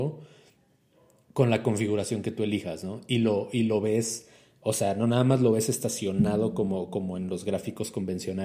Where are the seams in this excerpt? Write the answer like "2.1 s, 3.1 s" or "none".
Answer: none